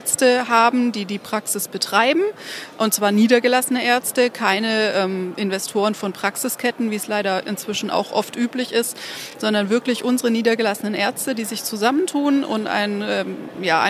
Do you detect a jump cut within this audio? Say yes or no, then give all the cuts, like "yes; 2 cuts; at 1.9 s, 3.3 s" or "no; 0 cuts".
no; 0 cuts